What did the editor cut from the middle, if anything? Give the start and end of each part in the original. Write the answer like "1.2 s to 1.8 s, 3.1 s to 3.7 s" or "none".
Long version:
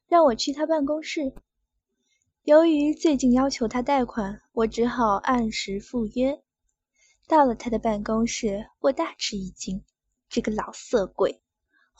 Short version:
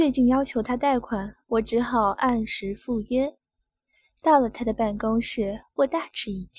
none